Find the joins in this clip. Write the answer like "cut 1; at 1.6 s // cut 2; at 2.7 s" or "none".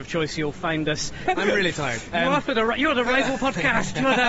cut 1; at 1.3 s